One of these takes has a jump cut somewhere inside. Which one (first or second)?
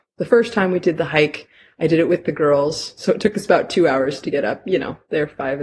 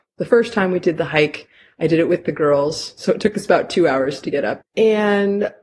second